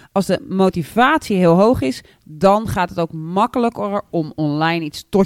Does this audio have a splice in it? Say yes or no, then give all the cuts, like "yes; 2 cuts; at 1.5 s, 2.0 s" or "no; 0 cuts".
no; 0 cuts